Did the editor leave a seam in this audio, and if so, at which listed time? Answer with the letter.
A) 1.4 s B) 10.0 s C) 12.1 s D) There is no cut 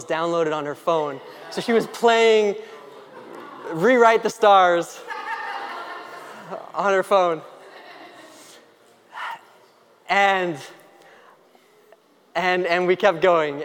D